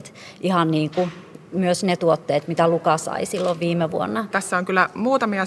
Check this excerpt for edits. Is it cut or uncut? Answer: cut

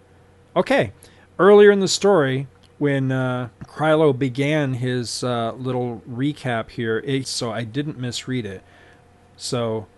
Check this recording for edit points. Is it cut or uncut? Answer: cut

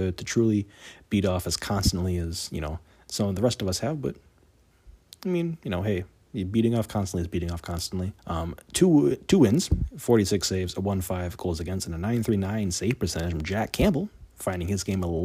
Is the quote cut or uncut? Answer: cut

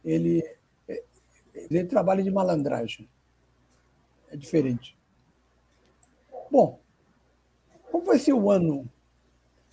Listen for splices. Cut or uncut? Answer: cut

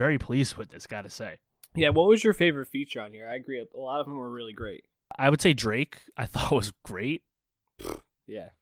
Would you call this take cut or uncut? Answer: uncut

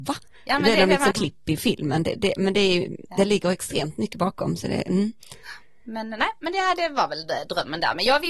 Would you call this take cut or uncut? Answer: cut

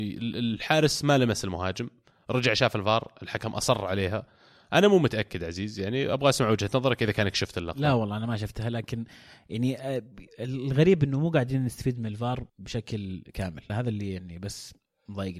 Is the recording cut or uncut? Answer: cut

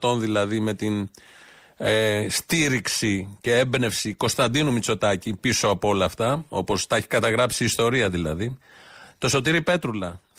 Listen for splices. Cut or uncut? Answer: uncut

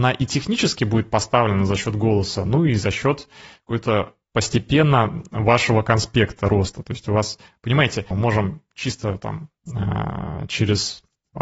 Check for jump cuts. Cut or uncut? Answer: cut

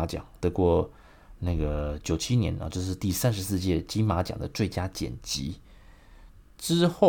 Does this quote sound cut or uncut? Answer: uncut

